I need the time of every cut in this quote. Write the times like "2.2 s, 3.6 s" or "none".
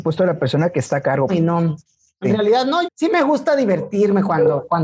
1.3 s, 2.8 s